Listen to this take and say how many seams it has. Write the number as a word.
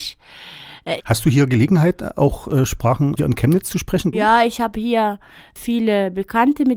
two